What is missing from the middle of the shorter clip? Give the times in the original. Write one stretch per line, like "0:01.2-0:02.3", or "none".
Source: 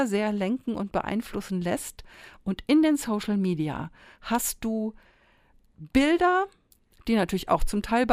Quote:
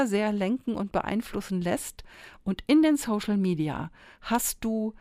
none

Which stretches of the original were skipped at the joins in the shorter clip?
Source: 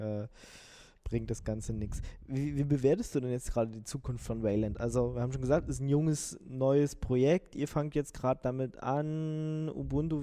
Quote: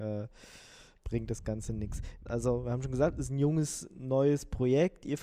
0:02.3-0:04.8

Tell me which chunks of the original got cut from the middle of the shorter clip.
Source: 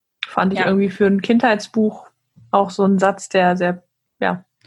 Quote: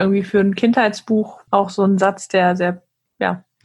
0:02.1-0:02.5

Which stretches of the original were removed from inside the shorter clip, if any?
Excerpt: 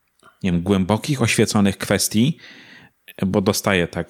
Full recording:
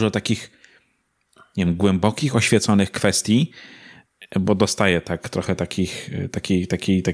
none

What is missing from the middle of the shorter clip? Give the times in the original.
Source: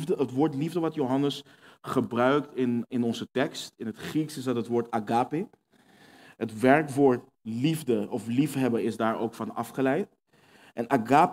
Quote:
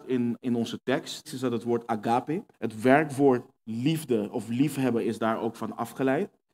0:03.7-0:04.3
0:05.6-0:06.3

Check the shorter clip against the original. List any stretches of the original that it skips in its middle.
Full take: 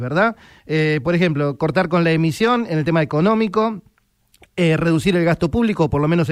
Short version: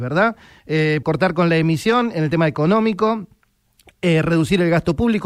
0:01.0-0:01.6

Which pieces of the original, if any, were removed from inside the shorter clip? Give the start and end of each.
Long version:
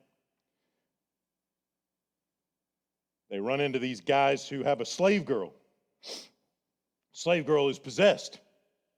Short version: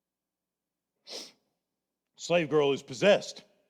0:02.5-0:05.9

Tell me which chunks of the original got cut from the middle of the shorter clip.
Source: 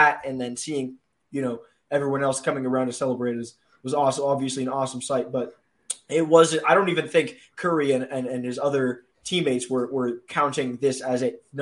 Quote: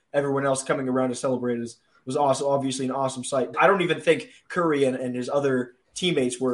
0:05.3-0:06.6
0:08.1-0:08.3

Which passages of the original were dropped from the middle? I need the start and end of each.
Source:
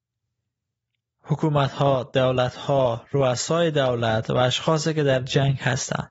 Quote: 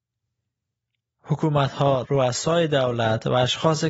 0:02.0-0:03.1

